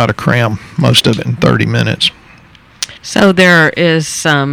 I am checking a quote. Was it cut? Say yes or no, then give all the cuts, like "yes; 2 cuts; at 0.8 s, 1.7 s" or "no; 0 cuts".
yes; 1 cut; at 3.0 s